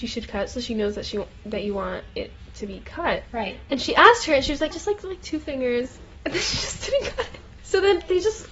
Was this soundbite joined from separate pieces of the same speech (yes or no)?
yes